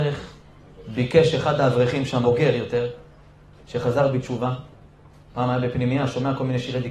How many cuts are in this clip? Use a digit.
1